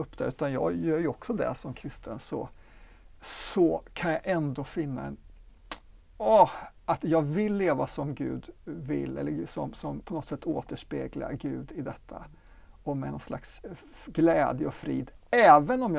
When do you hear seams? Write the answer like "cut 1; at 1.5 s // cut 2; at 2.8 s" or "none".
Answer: cut 1; at 10.0 s

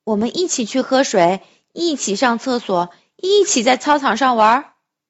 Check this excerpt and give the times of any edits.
none

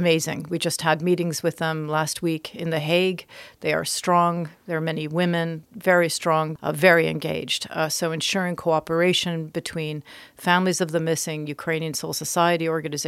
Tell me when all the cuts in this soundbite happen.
cut 1; at 6.6 s

